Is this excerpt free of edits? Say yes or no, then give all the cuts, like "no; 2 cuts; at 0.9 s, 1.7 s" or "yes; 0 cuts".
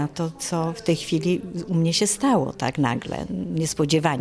yes; 0 cuts